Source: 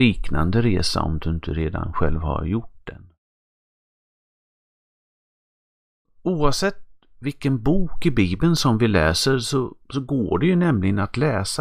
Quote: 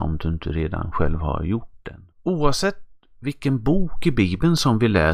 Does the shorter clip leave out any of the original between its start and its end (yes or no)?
yes